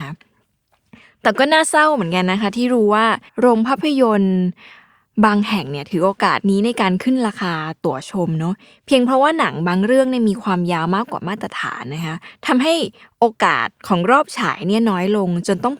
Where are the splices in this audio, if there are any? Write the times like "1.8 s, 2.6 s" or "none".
3.3 s